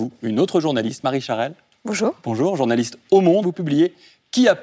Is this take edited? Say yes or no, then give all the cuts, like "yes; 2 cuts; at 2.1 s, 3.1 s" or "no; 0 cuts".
yes; 1 cut; at 3.4 s